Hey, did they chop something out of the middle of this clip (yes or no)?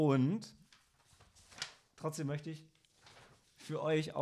no